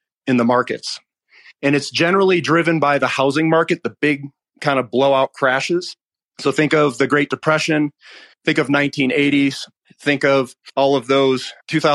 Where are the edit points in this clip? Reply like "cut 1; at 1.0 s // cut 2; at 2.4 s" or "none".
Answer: none